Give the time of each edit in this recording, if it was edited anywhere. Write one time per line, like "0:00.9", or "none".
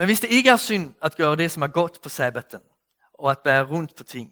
none